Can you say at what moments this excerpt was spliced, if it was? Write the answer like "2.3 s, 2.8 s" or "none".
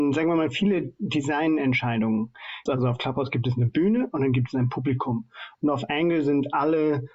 2.7 s, 5.5 s